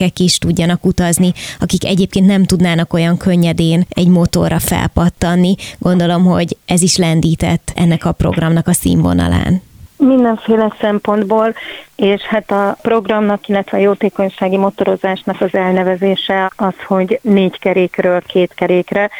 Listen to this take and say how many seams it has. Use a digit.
1